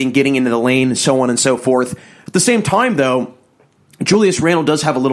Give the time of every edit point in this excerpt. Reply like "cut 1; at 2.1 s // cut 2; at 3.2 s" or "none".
none

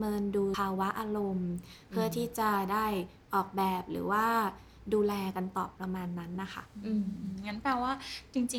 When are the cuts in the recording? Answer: cut 1; at 5.8 s

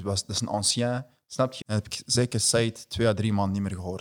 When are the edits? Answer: cut 1; at 1.6 s

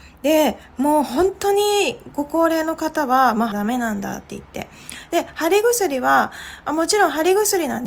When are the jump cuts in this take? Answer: cut 1; at 3.5 s

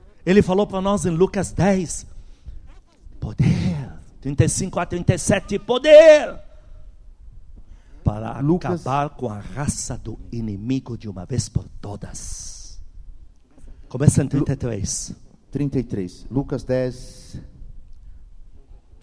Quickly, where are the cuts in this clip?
cut 1; at 3.1 s

